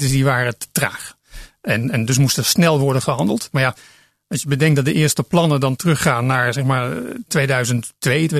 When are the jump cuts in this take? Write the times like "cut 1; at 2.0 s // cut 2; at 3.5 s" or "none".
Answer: cut 1; at 3.5 s